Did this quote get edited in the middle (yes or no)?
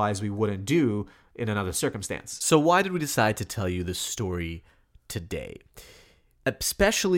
no